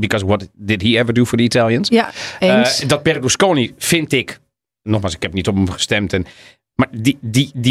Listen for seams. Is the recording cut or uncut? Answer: uncut